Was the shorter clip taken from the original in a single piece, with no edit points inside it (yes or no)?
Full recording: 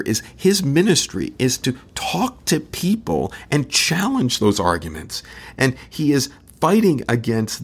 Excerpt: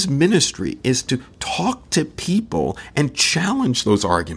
yes